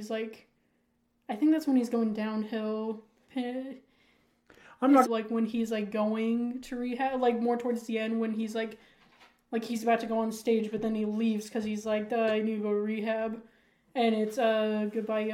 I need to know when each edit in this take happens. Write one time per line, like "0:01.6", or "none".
0:03.3
0:05.1